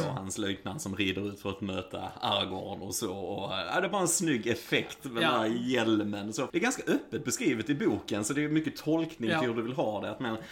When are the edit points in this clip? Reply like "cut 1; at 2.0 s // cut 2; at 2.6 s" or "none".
cut 1; at 6.5 s